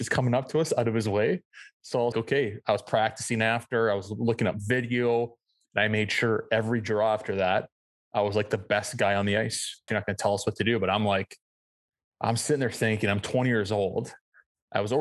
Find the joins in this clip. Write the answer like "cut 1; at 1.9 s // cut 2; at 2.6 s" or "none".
cut 1; at 2.1 s // cut 2; at 9.9 s